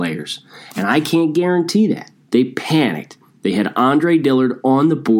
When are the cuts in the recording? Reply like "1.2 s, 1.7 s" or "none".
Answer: 2.2 s